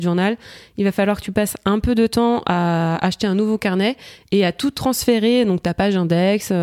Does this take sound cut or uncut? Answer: uncut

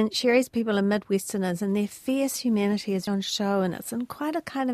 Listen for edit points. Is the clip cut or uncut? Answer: cut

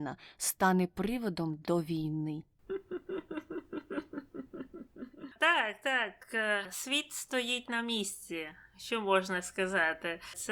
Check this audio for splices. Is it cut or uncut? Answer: uncut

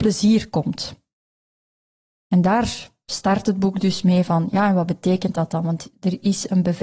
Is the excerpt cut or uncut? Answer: uncut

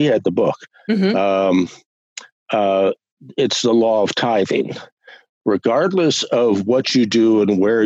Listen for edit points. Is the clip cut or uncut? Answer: uncut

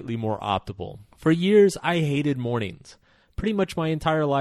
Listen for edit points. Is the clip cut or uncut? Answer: cut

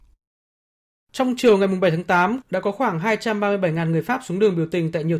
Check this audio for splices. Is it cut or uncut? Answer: cut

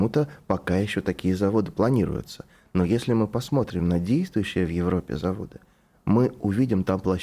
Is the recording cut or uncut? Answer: uncut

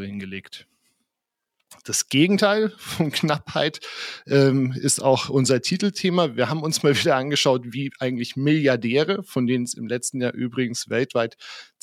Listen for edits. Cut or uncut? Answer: uncut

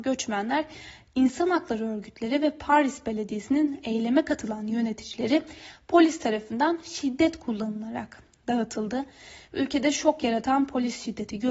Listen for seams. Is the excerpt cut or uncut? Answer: uncut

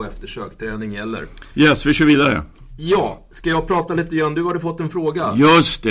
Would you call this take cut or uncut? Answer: uncut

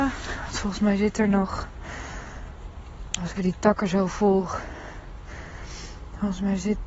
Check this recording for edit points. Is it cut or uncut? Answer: cut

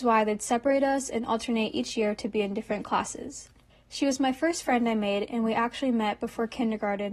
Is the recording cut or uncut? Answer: cut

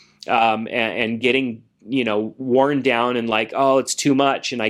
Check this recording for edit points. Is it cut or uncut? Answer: uncut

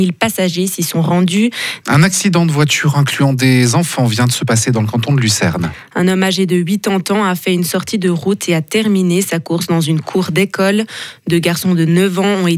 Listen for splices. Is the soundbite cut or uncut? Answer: cut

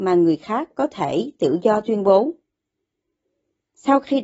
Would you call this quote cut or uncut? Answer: uncut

